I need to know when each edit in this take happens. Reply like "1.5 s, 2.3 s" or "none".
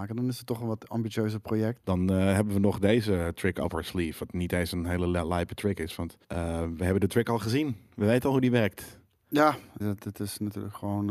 1.8 s, 6.2 s, 9.8 s